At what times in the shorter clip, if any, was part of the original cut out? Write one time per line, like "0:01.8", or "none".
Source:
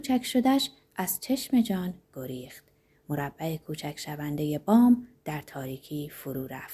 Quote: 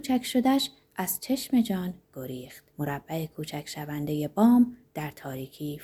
0:02.7